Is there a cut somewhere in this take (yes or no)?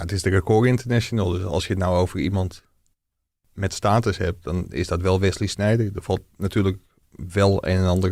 no